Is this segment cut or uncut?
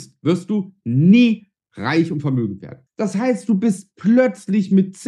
cut